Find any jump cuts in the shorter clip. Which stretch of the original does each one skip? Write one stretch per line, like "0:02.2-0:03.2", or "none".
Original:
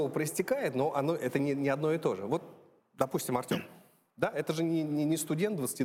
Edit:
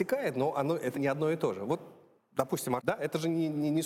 0:01.3-0:01.6
0:03.4-0:04.1